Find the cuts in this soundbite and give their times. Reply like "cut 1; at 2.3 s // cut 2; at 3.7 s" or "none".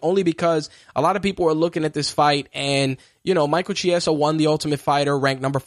none